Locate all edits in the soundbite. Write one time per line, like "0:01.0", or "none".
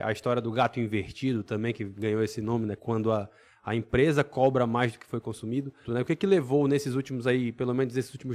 0:05.8